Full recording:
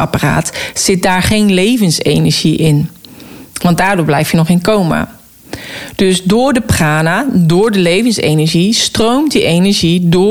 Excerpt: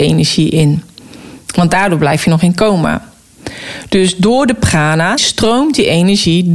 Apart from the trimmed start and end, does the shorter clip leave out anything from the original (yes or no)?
yes